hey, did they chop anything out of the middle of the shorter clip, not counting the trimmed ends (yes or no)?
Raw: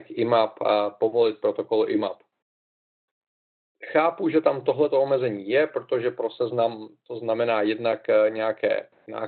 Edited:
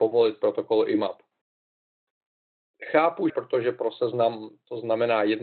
yes